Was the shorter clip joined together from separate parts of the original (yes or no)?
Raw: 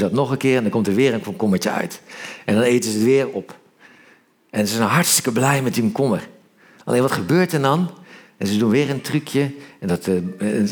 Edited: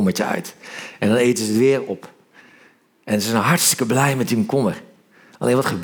no